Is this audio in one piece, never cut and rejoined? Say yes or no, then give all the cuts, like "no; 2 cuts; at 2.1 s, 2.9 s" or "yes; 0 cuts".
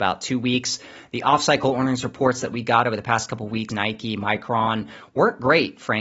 no; 1 cut; at 3.7 s